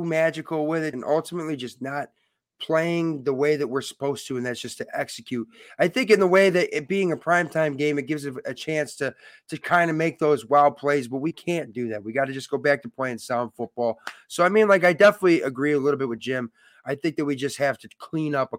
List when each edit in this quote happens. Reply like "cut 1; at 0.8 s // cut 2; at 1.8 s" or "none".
cut 1; at 0.9 s